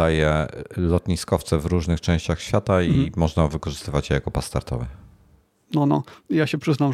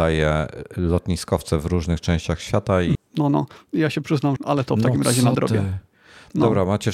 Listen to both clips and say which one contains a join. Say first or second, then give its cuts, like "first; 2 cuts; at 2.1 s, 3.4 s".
second; 2 cuts; at 2.9 s, 4.4 s